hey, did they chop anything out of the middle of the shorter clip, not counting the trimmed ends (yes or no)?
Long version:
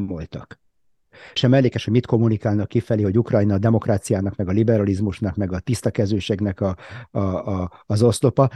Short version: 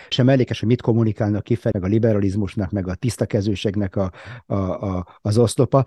yes